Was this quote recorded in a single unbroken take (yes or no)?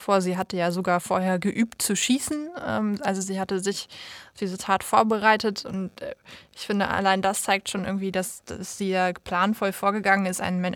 yes